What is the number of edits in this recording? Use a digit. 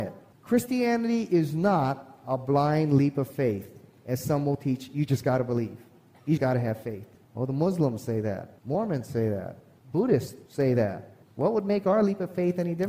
2